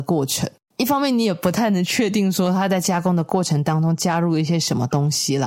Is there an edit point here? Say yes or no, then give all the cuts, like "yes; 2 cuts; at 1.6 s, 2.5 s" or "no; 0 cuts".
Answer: no; 0 cuts